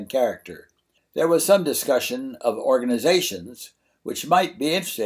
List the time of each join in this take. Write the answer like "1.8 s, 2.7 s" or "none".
1.0 s